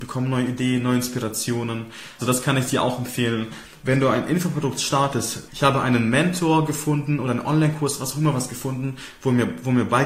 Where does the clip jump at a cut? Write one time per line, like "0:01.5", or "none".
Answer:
0:02.2
0:05.5